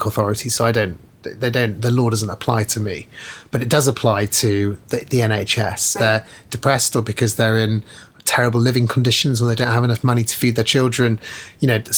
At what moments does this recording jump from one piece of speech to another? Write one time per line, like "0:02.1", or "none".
0:05.9